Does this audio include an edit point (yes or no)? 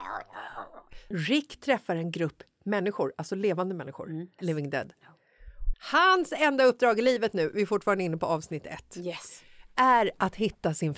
yes